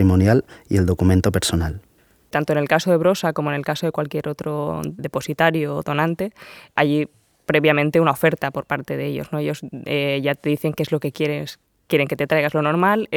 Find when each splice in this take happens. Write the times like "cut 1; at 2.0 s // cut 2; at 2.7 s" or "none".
none